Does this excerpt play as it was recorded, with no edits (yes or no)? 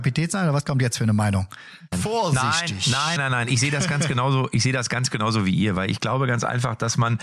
no